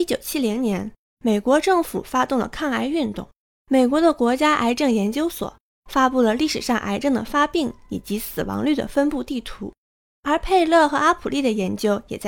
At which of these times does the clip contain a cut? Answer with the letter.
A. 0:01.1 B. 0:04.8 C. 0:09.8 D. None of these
D